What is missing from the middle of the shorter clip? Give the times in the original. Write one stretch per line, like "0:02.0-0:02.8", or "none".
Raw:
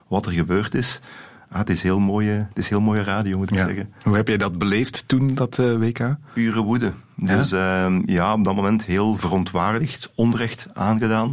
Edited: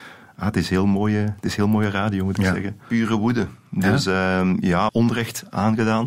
0:03.9-0:06.3
0:08.3-0:10.1